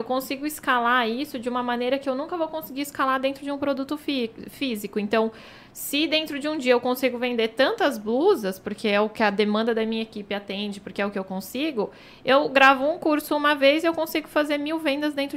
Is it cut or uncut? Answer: uncut